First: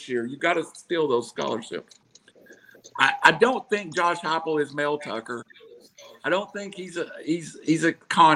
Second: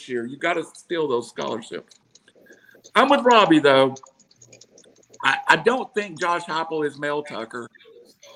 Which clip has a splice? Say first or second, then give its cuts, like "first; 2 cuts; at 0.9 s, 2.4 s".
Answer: first; 1 cut; at 2.9 s